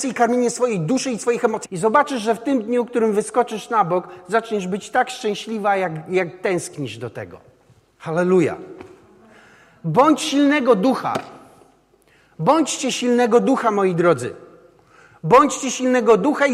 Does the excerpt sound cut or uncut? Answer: cut